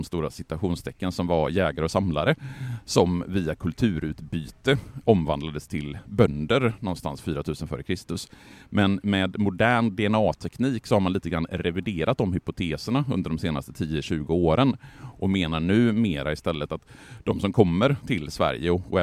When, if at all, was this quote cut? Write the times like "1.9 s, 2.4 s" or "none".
none

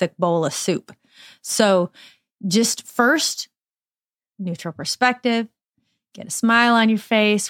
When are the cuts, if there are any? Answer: 4.2 s

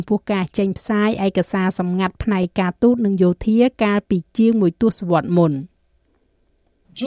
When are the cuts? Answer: none

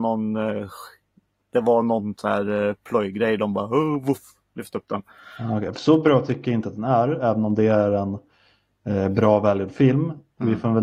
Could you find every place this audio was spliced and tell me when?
none

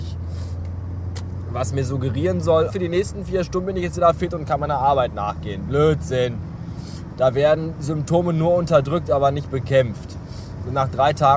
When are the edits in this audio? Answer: 2.7 s

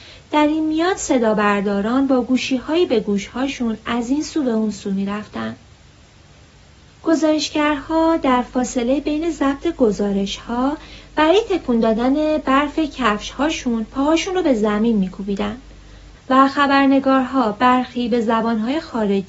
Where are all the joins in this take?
16.2 s

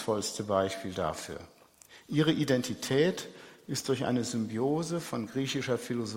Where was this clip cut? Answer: none

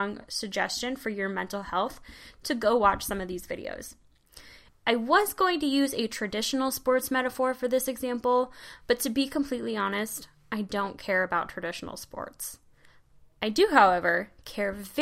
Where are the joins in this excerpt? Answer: 4.7 s

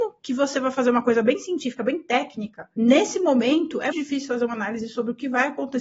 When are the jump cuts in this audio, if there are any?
3.9 s

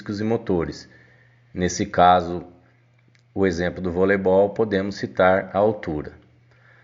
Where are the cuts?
none

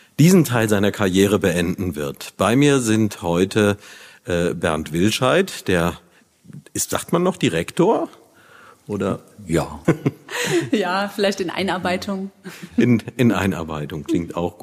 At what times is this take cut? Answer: 9.8 s

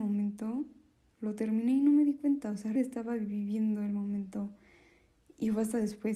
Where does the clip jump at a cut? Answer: 2.8 s

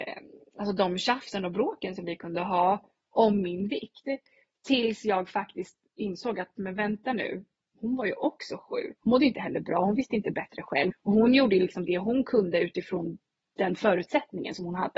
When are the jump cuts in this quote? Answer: 9.0 s, 10.9 s

